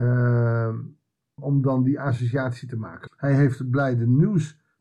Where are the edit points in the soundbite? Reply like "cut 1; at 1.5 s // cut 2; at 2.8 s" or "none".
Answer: cut 1; at 1.4 s // cut 2; at 3.1 s